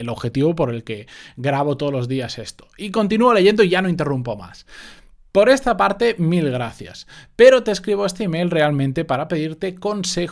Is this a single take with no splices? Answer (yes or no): yes